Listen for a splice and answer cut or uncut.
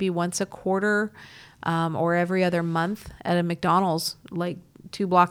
uncut